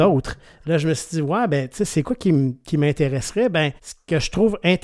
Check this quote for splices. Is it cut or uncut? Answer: cut